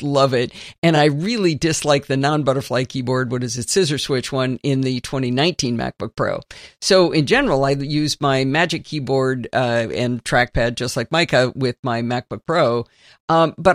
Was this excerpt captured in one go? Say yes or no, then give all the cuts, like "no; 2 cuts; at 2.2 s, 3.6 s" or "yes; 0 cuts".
yes; 0 cuts